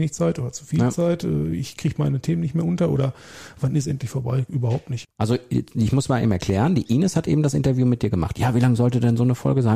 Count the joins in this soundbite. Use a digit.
2